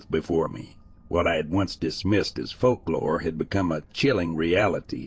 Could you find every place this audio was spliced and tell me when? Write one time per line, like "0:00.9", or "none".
none